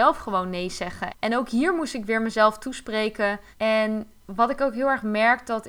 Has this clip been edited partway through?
yes; 2 cuts; at 1.1 s, 3.5 s

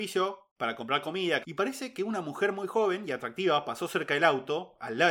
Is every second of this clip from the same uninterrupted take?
no; 1 cut; at 1.4 s

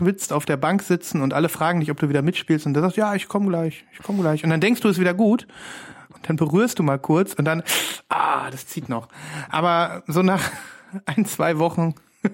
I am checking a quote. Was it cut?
yes; 1 cut; at 6.2 s

